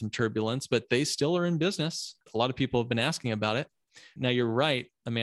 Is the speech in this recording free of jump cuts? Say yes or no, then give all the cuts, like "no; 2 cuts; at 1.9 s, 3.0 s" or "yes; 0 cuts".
no; 2 cuts; at 2.2 s, 4.2 s